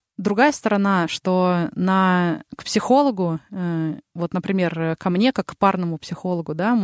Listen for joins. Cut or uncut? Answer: uncut